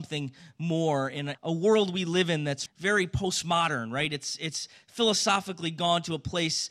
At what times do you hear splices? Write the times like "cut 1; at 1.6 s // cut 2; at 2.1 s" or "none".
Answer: cut 1; at 1.3 s // cut 2; at 2.7 s

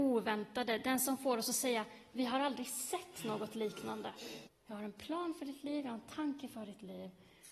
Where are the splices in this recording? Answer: cut 1; at 4.5 s

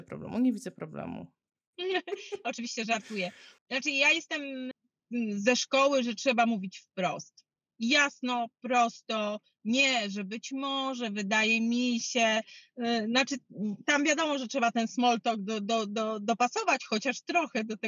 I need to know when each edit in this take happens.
cut 1; at 1.5 s

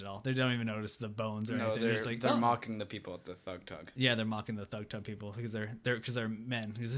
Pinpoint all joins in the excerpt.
none

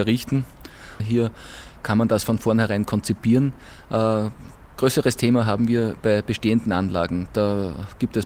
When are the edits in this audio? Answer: cut 1; at 1.0 s

